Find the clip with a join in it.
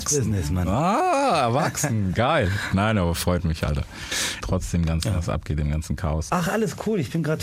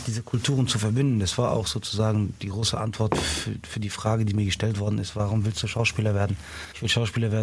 first; 2 cuts; at 4.4 s, 6.3 s

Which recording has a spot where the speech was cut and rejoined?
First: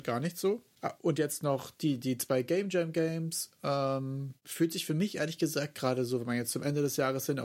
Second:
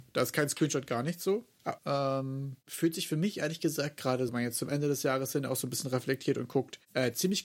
second; 2 cuts; at 1.8 s, 4.3 s

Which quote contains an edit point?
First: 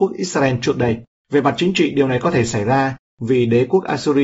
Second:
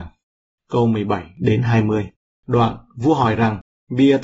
first; 1 cut; at 1.2 s

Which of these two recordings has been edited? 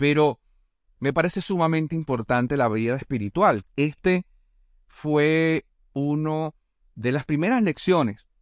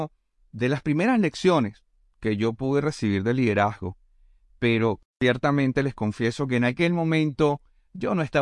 first; 1 cut; at 3.6 s

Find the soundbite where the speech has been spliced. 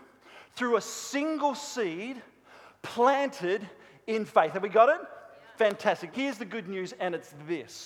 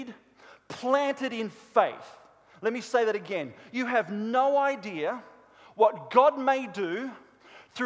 first; 1 cut; at 6.1 s

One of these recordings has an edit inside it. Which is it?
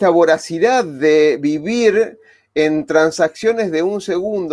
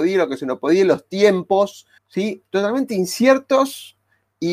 second; 1 cut; at 2.0 s

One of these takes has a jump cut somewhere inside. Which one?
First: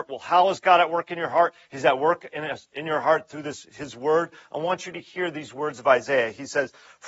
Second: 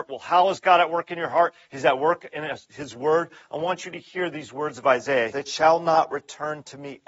second; 2 cuts; at 2.7 s, 5.3 s

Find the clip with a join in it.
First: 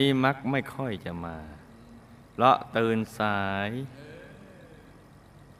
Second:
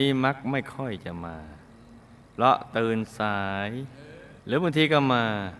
second; 1 cut; at 4.4 s

